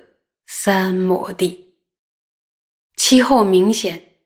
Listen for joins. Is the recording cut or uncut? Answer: uncut